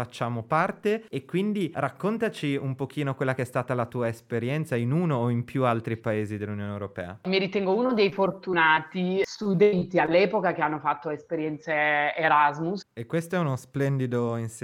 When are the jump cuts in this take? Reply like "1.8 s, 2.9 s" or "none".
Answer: 12.8 s